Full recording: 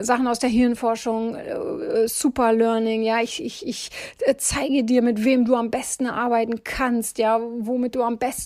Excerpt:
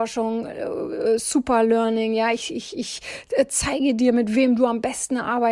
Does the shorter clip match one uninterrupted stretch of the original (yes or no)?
yes